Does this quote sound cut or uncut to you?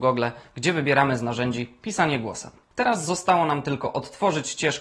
uncut